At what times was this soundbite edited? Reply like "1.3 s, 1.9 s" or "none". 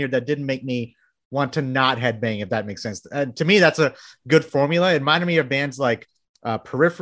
none